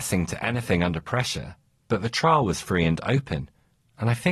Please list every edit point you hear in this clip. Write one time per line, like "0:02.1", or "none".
none